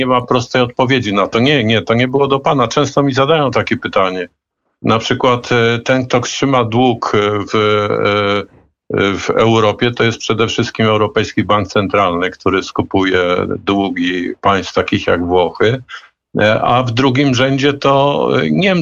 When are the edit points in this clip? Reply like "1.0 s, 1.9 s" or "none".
none

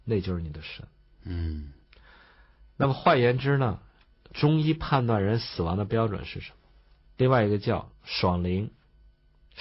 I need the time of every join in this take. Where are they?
7.0 s

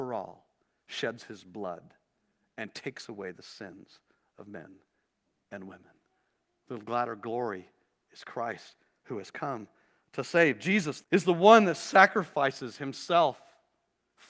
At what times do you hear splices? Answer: 11.0 s

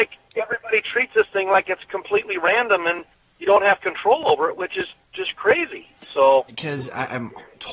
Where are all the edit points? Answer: 6.5 s

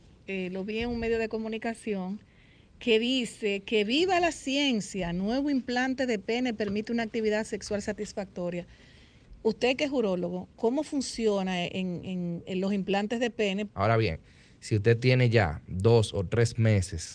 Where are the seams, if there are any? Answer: 13.7 s

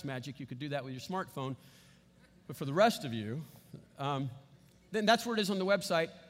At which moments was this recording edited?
none

